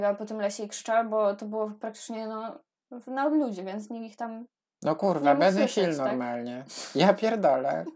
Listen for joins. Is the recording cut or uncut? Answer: uncut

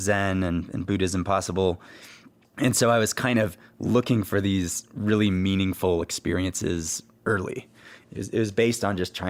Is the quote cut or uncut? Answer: uncut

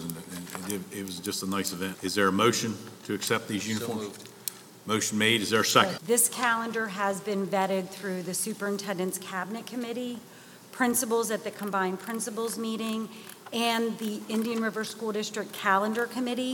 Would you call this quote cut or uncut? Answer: cut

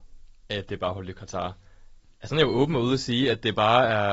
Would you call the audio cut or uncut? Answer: uncut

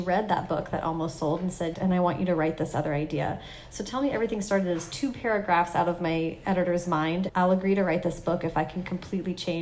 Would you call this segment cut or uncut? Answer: cut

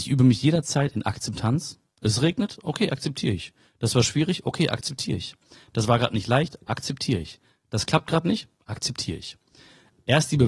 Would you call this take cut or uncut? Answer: uncut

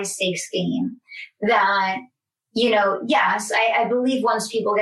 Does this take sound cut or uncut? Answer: uncut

